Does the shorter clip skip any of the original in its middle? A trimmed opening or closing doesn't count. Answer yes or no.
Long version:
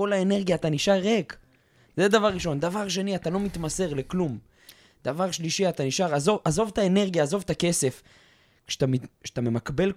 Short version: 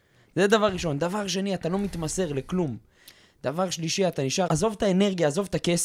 yes